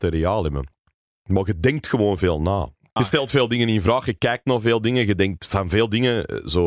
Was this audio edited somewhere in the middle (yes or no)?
yes